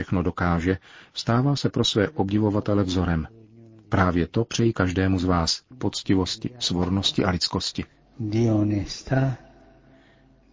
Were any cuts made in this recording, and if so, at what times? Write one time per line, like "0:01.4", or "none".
0:05.7